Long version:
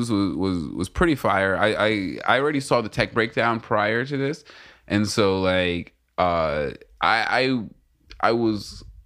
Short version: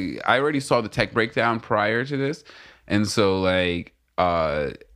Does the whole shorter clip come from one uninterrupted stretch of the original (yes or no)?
yes